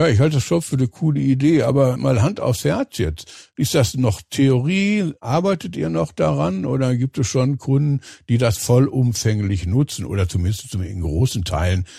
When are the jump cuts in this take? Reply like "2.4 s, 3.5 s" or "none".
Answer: none